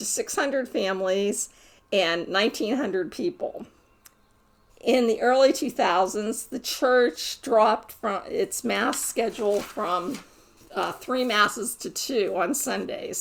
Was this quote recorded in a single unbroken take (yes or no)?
no